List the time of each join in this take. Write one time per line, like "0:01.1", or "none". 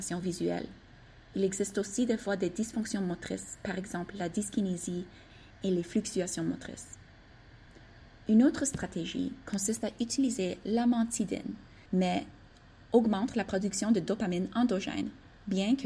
0:11.9